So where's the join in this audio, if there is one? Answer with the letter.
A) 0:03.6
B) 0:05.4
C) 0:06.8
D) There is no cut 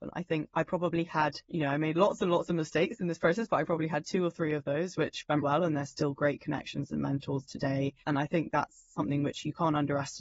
B